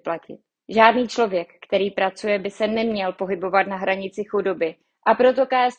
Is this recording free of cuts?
yes; 0 cuts

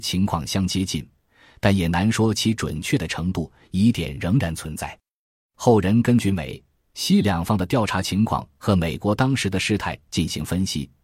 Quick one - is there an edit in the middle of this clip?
no; 0 cuts

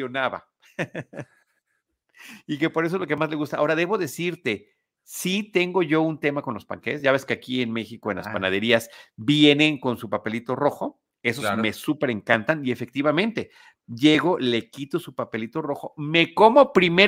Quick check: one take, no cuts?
yes; 0 cuts

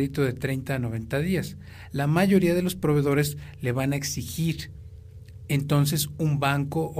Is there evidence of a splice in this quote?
no; 0 cuts

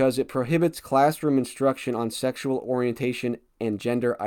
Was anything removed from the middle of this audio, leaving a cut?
no; 0 cuts

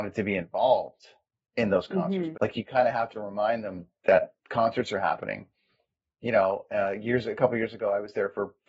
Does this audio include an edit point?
yes; 1 cut; at 2.3 s

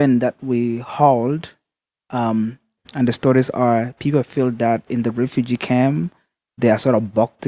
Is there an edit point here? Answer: yes; 1 cut; at 2.8 s

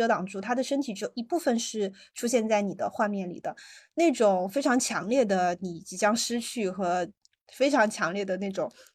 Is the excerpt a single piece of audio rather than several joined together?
yes; 0 cuts

